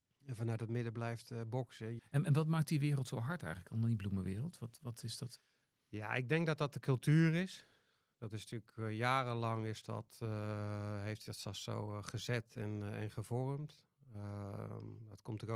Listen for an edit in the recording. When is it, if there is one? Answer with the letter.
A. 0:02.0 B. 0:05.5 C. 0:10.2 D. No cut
A